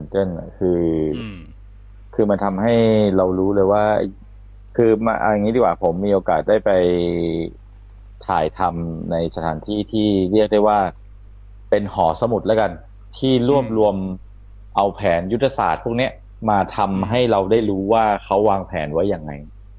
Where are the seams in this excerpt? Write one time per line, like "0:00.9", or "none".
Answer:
none